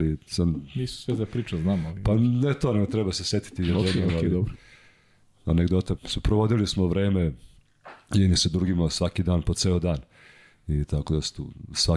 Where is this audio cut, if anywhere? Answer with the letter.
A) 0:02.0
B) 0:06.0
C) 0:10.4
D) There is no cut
B